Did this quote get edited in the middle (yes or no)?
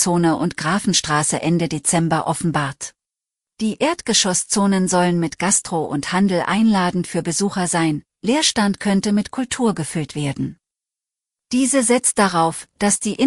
yes